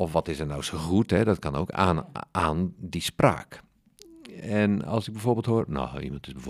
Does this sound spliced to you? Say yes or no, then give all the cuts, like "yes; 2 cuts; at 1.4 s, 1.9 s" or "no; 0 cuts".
no; 0 cuts